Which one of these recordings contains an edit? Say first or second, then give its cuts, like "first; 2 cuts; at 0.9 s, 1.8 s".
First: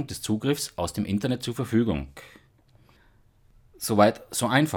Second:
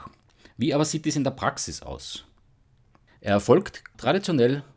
second; 1 cut; at 3.2 s